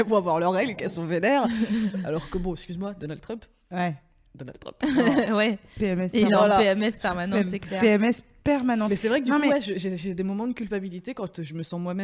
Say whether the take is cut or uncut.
uncut